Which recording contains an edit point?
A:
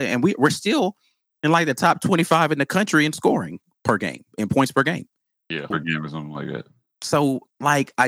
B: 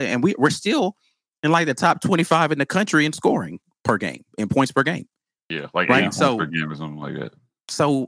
A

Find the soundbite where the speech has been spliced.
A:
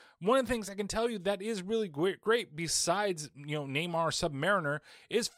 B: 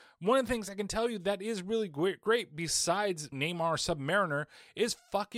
B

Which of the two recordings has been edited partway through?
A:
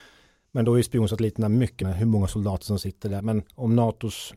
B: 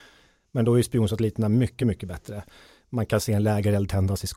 A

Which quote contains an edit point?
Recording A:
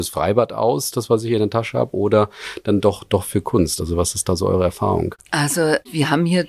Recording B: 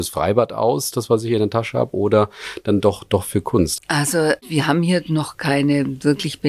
B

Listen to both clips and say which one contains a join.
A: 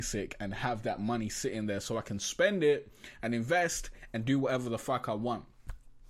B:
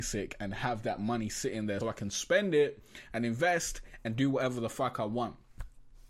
B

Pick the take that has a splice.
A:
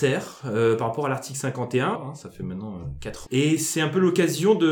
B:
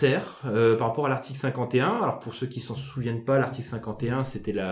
A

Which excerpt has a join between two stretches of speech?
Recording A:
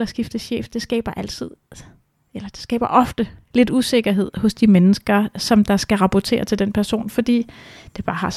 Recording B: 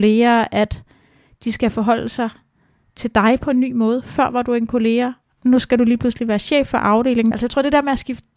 B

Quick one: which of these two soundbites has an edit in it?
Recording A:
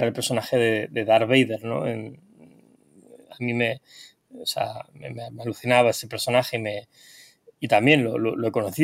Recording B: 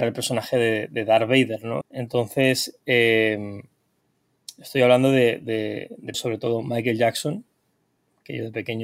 B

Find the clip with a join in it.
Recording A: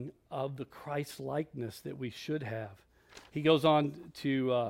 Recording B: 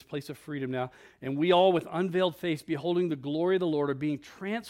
A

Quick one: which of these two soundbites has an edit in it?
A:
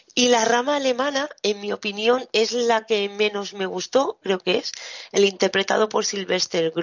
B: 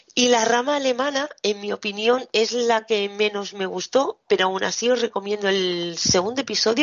A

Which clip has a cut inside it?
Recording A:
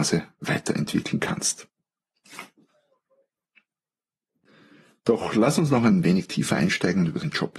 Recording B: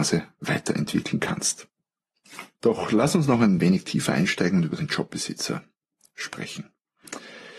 B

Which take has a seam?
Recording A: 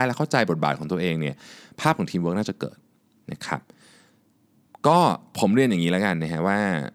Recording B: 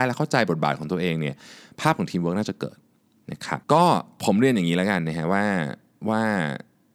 B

